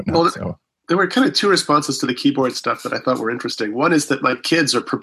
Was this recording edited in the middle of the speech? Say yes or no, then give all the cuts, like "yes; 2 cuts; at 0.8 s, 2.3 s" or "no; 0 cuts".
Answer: no; 0 cuts